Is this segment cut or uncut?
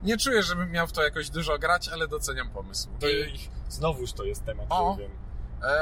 cut